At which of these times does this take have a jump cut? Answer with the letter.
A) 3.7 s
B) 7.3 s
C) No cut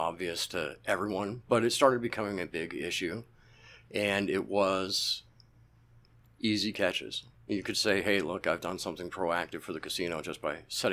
C